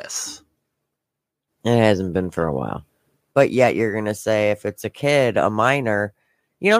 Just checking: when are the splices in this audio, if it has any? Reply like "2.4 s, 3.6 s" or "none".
1.5 s, 3.3 s